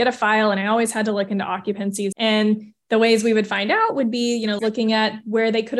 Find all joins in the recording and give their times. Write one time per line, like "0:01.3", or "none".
0:02.1
0:04.6